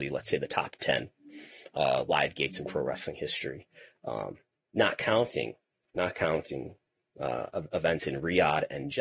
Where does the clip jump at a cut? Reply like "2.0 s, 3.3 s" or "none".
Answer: none